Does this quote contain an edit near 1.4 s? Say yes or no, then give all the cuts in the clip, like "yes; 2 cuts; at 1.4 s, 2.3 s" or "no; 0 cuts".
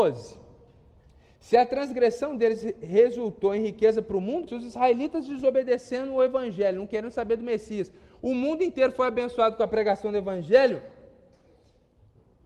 no; 1 cut; at 4.5 s